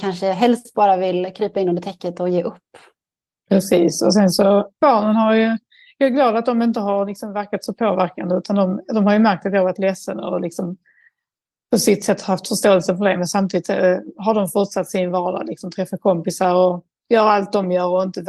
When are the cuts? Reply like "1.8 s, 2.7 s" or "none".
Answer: none